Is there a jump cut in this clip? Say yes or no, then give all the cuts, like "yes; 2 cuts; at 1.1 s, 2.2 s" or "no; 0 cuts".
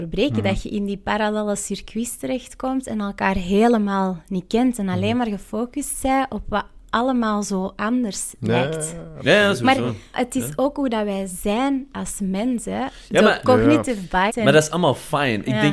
yes; 2 cuts; at 10.1 s, 14.3 s